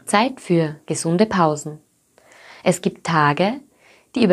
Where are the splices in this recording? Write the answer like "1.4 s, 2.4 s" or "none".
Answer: none